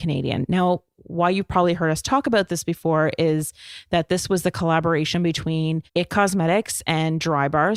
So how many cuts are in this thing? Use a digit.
1